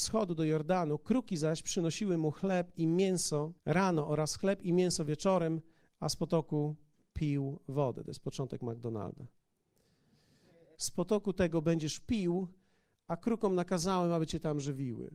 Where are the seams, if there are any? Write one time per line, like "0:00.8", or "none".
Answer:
0:03.6
0:10.7

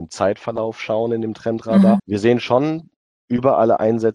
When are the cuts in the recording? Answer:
0:02.0

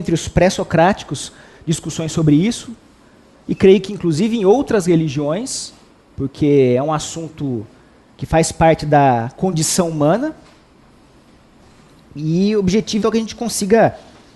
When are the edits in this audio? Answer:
0:13.0

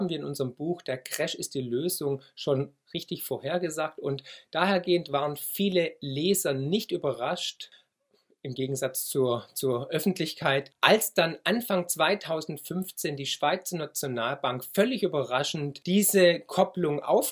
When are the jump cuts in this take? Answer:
none

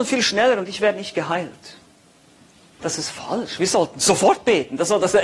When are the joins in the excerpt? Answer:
0:02.8

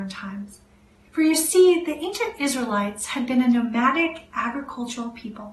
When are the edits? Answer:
0:01.1

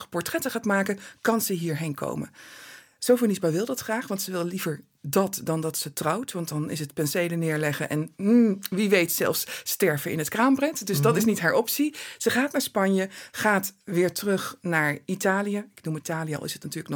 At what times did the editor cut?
0:13.3
0:16.0

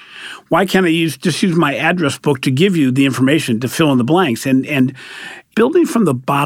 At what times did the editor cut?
none

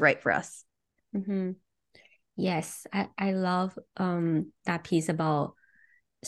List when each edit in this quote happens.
0:01.0

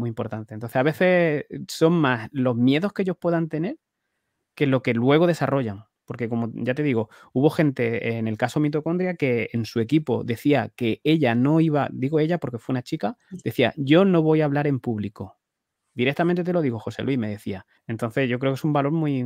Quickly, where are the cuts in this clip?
0:17.8

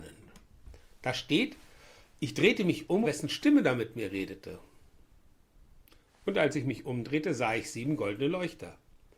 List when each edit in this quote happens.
0:03.0

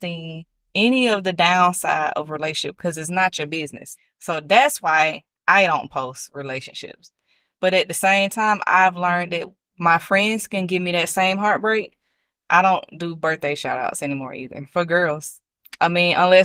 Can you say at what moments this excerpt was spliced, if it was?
none

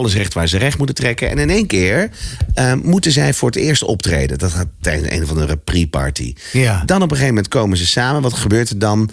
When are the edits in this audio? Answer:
none

